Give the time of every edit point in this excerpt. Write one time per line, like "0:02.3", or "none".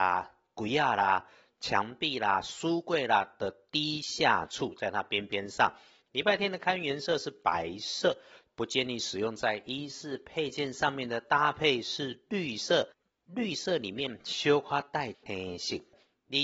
0:06.0
0:08.5